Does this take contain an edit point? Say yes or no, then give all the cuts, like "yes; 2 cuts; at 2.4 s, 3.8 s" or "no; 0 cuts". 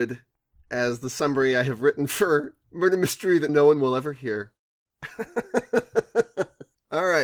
yes; 1 cut; at 3.5 s